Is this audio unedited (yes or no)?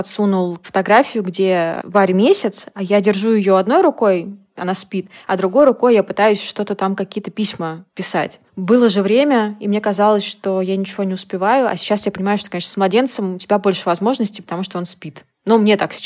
no